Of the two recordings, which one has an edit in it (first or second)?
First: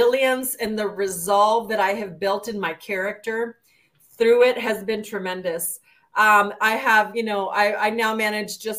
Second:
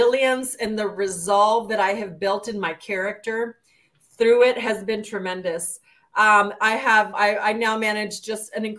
second